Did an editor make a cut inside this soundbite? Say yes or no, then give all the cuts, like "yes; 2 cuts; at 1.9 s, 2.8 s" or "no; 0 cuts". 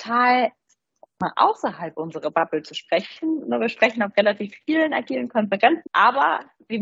yes; 1 cut; at 5.9 s